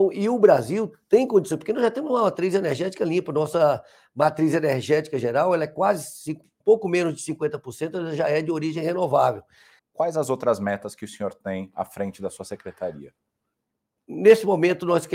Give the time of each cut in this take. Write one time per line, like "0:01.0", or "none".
0:06.6
0:09.8